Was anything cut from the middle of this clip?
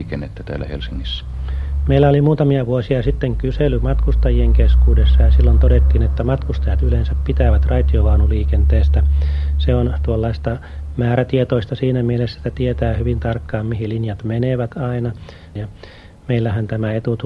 yes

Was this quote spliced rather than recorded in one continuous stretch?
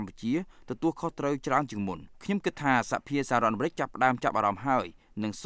yes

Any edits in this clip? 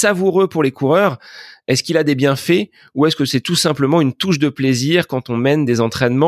no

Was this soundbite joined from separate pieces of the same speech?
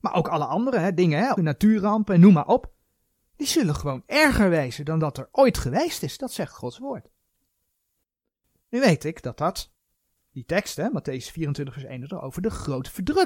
yes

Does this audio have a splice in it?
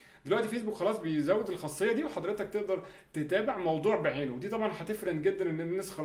yes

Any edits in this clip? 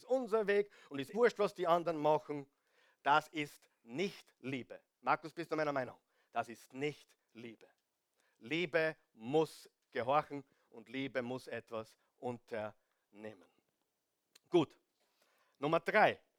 yes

